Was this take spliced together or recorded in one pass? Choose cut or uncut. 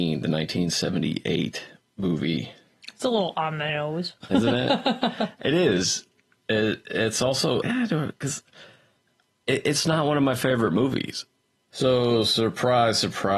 cut